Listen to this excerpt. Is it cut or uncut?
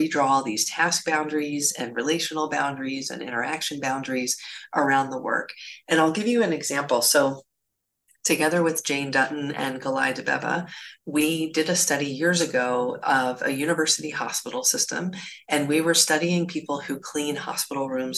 uncut